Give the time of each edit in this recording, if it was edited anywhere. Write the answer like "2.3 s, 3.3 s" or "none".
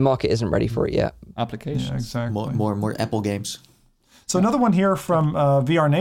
1.3 s